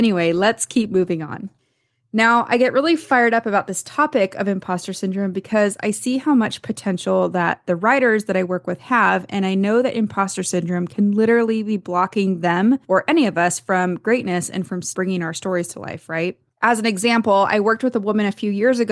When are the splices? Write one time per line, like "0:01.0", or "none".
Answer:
none